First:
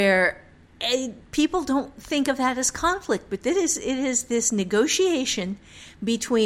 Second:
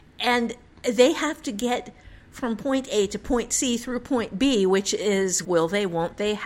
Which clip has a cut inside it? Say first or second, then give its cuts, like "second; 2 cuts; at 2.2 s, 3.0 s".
second; 1 cut; at 5.4 s